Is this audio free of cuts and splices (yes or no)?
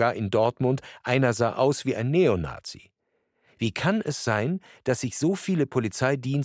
yes